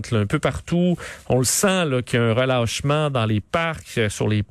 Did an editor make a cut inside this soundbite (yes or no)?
no